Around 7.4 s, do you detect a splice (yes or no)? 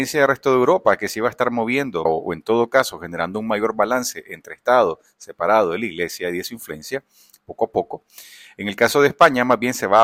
no